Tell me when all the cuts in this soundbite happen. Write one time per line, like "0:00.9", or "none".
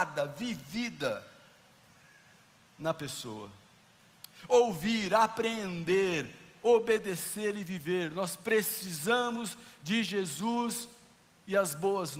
none